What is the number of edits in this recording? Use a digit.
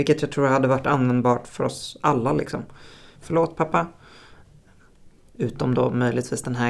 2